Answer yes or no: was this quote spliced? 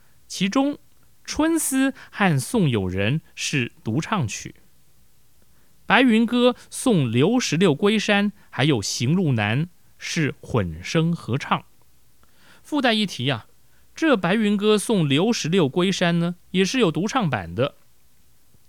no